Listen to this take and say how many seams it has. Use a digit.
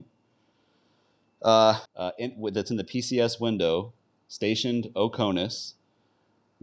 1